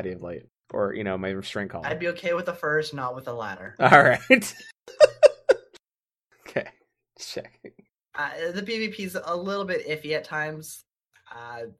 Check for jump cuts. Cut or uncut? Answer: uncut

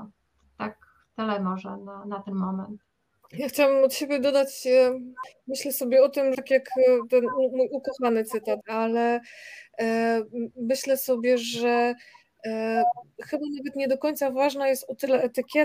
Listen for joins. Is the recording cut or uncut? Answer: cut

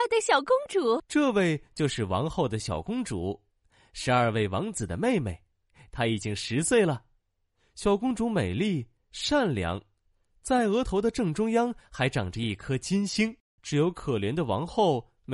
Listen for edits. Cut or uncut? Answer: cut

